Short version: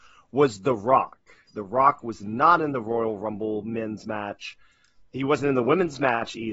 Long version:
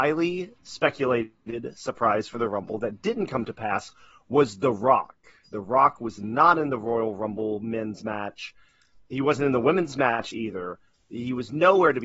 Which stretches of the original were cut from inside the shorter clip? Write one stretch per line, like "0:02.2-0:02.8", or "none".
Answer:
none